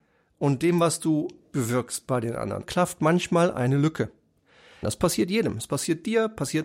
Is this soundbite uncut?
no; 3 cuts; at 1.5 s, 2.6 s, 4.8 s

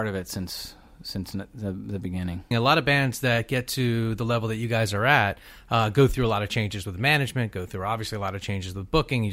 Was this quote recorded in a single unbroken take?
no; 1 cut; at 2.5 s

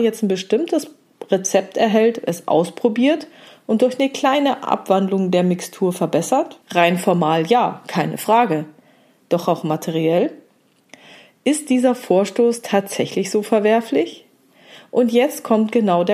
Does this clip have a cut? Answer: yes; 1 cut; at 6.6 s

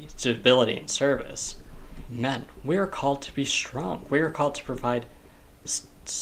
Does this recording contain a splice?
yes; 1 cut; at 2.1 s

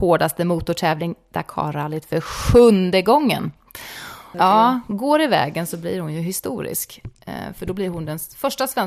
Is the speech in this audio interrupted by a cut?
yes; 1 cut; at 4.3 s

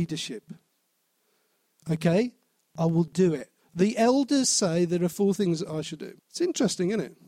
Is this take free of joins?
no; 2 cuts; at 3.6 s, 6.2 s

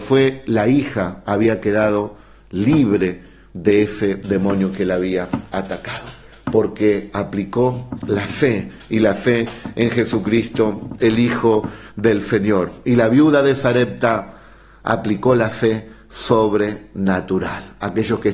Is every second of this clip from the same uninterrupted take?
yes; 0 cuts

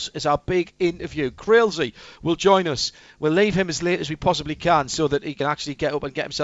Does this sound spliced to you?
no; 0 cuts

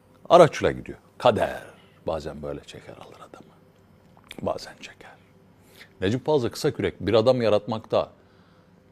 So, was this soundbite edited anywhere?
no; 0 cuts

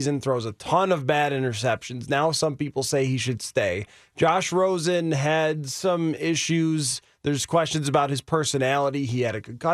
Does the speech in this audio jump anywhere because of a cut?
no; 0 cuts

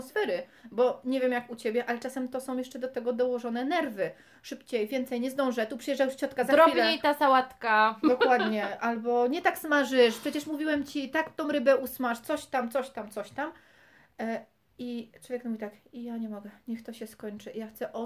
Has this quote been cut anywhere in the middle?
no; 0 cuts

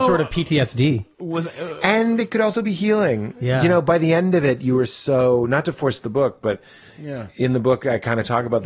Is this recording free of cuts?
yes; 0 cuts

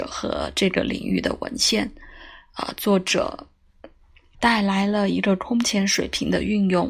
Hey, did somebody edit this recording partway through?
yes; 1 cut; at 4.3 s

